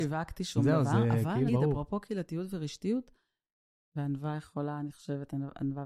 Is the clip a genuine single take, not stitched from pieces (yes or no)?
no